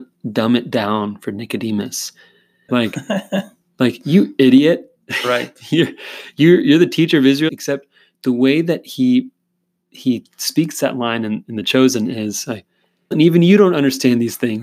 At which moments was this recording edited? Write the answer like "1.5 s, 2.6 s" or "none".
2.7 s, 7.5 s, 13.1 s